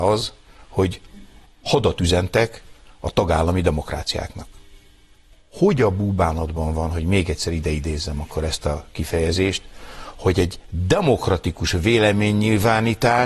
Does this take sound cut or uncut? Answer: uncut